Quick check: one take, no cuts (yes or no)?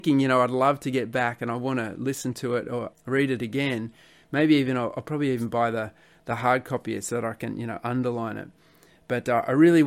no